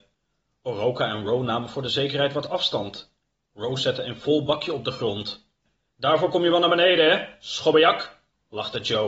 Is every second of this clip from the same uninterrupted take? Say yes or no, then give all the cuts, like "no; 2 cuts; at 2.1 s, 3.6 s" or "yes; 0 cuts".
yes; 0 cuts